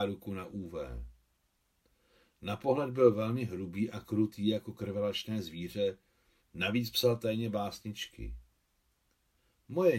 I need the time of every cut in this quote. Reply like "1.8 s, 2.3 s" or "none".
6.4 s